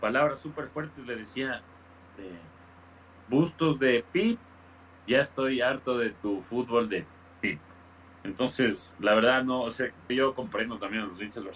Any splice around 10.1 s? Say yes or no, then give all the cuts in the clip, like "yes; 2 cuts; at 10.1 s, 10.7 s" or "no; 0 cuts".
yes; 1 cut; at 10.1 s